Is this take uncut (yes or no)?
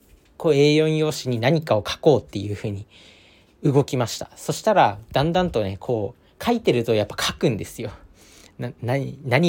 yes